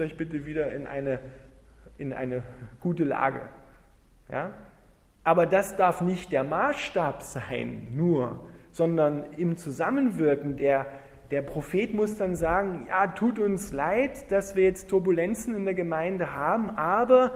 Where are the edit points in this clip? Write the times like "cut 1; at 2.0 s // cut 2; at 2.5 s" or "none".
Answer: none